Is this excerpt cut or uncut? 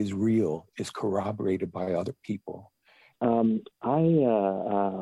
cut